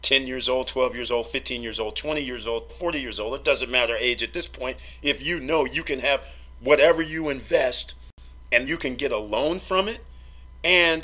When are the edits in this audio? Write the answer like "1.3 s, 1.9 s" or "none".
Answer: 2.7 s, 8.7 s